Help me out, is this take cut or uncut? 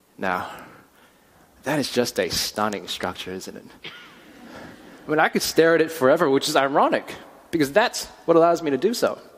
uncut